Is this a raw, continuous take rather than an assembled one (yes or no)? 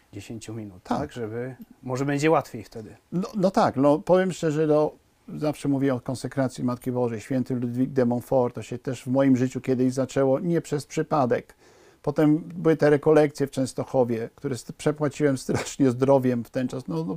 yes